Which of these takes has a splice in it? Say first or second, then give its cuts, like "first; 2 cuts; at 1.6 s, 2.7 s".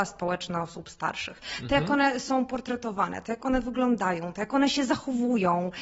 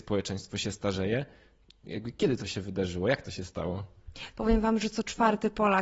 second; 1 cut; at 4.3 s